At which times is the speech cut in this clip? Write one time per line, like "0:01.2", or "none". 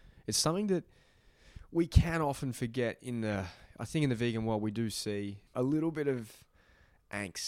0:05.5